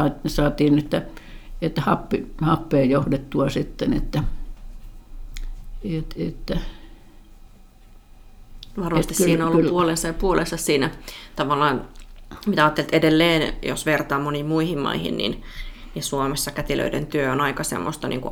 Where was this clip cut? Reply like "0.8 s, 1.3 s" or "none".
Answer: none